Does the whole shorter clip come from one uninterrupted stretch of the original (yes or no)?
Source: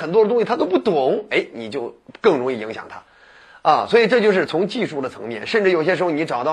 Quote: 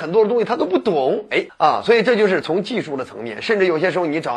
no